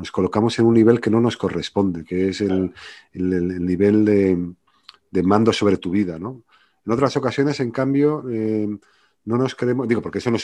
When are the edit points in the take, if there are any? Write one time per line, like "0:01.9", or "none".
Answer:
none